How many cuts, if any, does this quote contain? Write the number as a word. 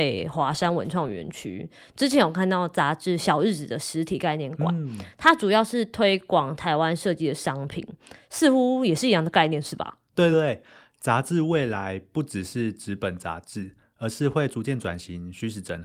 one